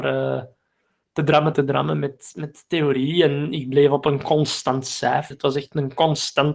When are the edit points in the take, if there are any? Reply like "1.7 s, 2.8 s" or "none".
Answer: 1.5 s, 5.3 s